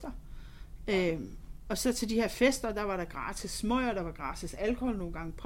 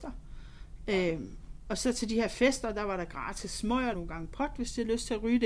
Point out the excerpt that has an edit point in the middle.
second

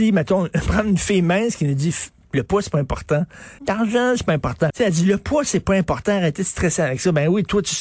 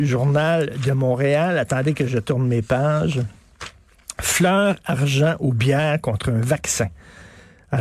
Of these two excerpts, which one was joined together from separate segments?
first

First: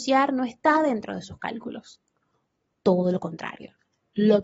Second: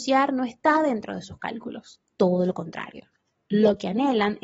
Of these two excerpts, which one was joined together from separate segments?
second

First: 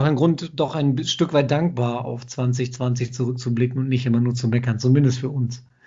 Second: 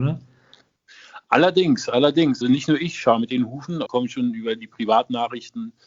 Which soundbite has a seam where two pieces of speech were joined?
second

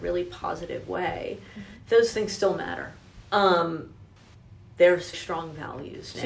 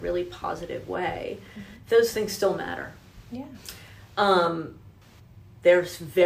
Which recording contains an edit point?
first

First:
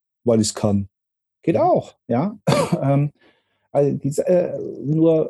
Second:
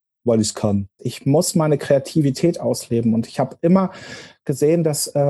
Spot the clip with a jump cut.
second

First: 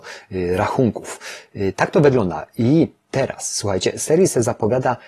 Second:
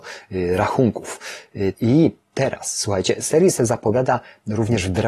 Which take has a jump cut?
second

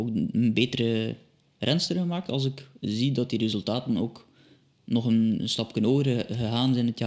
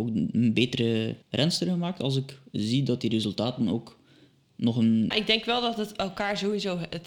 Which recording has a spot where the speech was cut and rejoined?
second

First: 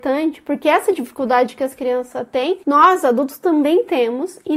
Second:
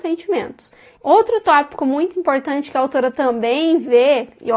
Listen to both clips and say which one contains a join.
second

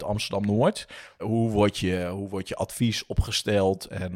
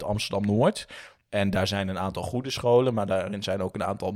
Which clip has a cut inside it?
first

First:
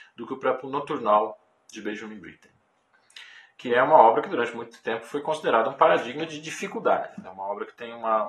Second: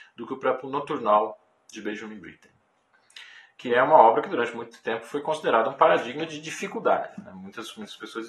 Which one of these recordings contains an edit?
first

